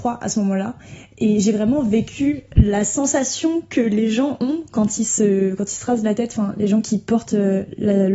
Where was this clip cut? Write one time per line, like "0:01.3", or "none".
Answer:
none

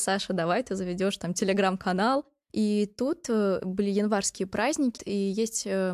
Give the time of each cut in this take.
0:02.5
0:05.0

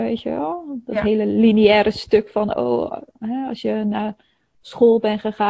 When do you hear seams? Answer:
none

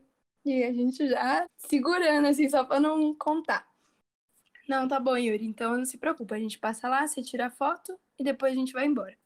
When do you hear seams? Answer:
0:01.5

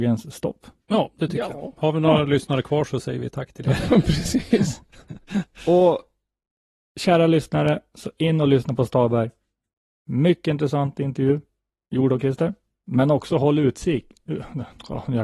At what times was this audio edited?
0:07.9

